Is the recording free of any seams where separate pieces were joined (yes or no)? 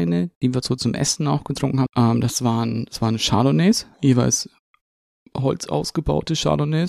no